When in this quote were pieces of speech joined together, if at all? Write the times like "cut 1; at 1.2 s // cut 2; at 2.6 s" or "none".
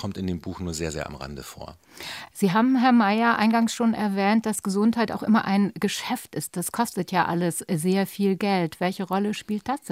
none

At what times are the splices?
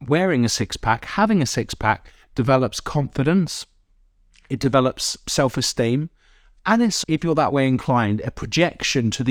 cut 1; at 7.0 s

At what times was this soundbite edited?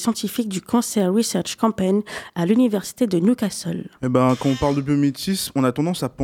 cut 1; at 4.0 s

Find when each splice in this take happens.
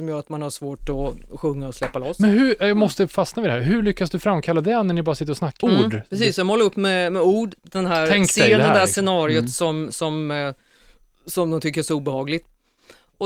cut 1; at 5.6 s

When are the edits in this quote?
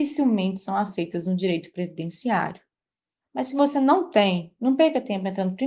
cut 1; at 3.2 s

